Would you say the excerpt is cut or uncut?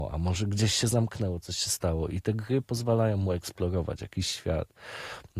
uncut